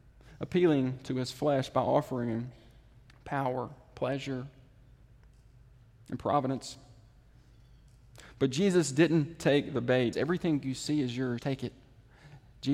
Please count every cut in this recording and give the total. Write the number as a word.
two